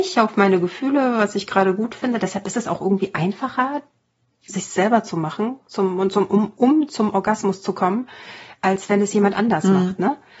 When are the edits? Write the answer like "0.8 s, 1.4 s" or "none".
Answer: none